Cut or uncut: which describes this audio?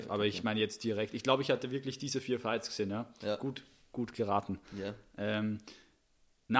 uncut